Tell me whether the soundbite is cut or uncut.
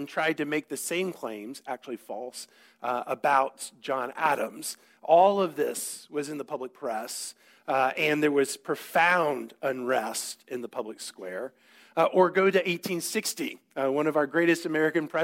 uncut